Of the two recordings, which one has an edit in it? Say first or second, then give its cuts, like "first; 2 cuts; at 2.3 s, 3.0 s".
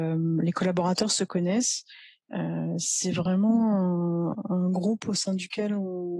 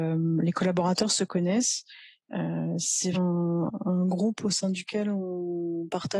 second; 1 cut; at 3.1 s